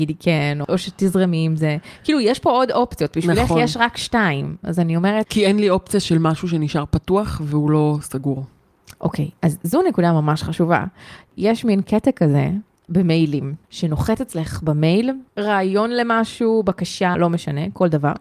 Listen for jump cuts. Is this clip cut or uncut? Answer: cut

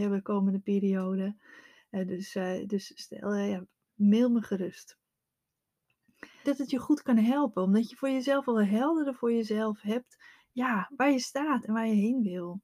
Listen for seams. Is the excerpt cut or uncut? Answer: cut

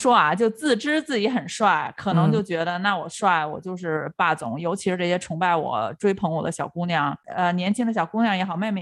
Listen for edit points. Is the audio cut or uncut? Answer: uncut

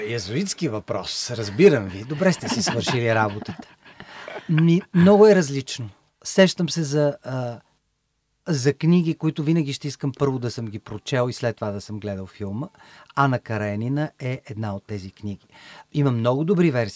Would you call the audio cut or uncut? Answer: uncut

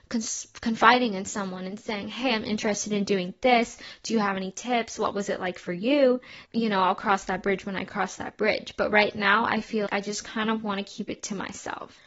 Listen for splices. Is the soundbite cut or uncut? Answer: cut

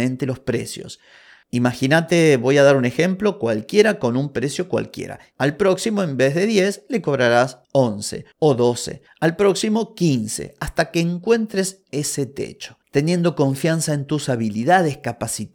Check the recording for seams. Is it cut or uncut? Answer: cut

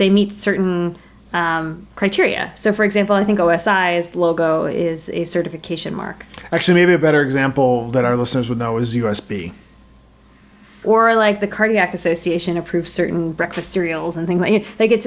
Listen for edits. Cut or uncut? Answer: cut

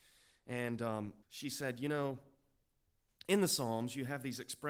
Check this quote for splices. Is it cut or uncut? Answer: cut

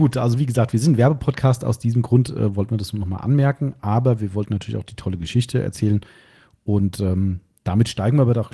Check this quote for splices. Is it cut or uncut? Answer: uncut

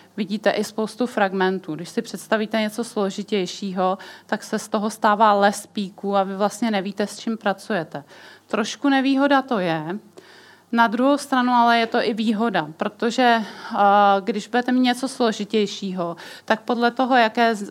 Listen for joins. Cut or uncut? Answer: uncut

